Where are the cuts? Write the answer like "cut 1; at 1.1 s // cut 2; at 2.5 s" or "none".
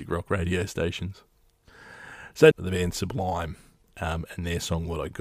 cut 1; at 2.5 s